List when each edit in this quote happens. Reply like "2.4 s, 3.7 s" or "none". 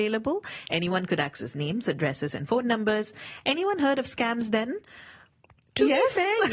none

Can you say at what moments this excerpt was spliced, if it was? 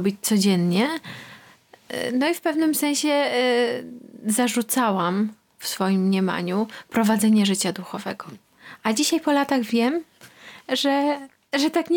none

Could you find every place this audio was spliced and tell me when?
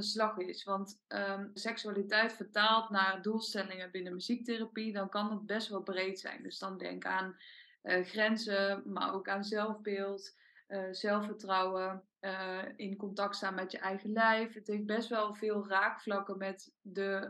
1.6 s

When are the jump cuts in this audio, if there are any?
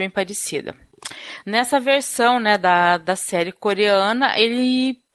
none

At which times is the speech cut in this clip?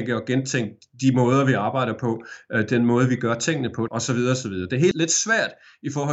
3.9 s, 4.9 s

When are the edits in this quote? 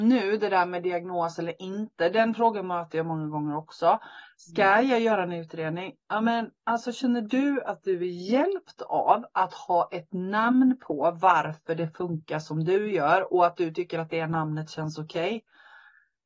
none

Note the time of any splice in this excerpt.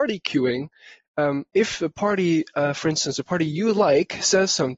none

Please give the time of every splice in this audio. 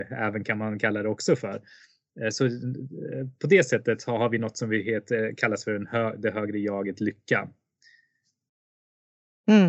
none

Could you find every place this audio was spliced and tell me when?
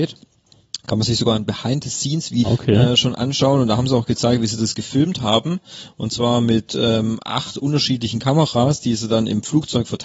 2.4 s

